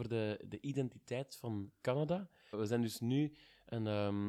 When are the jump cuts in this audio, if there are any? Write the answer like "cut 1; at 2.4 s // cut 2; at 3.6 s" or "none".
cut 1; at 2.5 s